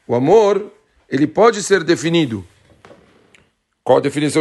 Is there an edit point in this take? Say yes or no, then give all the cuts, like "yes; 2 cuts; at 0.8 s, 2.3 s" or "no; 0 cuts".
no; 0 cuts